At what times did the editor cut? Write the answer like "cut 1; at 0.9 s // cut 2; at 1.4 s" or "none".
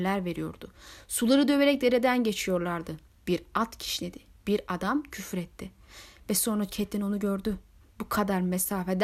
cut 1; at 7.8 s